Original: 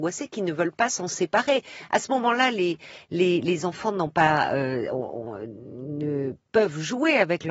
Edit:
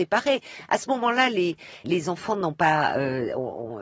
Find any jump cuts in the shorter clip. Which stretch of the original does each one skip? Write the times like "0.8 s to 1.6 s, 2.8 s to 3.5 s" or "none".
3.1 s to 3.4 s